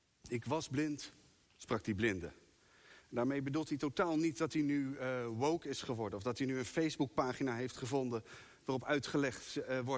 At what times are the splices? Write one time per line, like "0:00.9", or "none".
0:01.5